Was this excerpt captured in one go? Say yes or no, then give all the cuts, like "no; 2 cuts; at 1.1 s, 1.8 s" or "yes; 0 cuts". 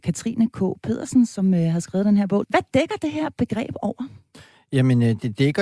no; 1 cut; at 2.4 s